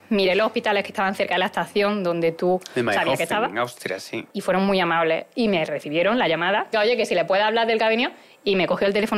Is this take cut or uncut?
cut